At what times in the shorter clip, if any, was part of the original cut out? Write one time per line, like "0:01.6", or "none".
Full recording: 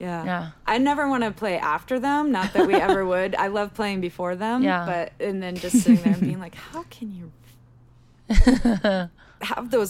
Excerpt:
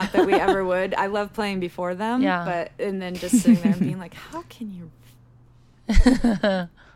none